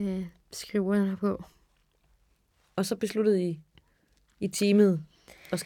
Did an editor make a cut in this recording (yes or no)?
no